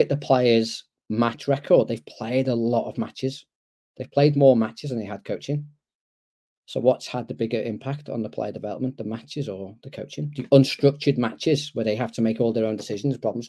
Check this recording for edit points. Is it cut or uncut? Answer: uncut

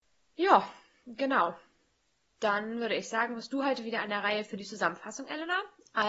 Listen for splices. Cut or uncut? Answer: uncut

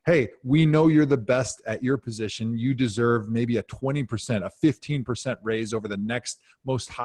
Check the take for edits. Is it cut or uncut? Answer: uncut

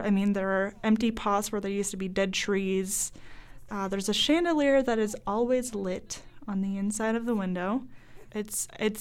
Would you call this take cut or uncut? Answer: cut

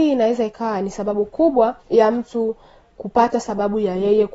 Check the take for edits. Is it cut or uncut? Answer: cut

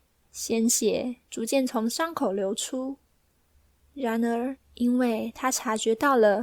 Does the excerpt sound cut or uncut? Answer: cut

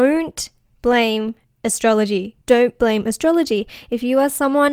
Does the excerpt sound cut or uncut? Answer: cut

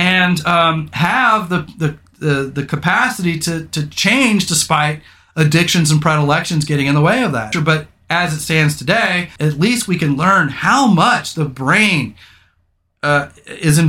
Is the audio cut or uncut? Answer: cut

